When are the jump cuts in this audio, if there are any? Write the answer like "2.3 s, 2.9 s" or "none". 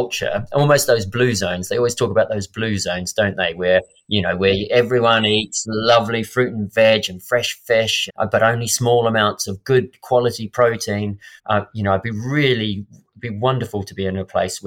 8.1 s, 11.4 s